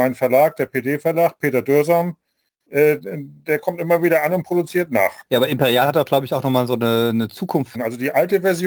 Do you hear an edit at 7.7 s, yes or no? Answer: yes